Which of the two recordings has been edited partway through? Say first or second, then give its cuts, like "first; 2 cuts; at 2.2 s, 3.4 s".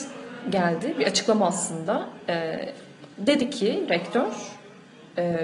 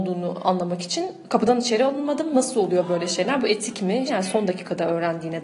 second; 1 cut; at 4.1 s